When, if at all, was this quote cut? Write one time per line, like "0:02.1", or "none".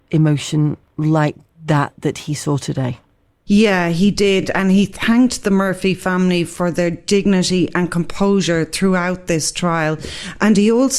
none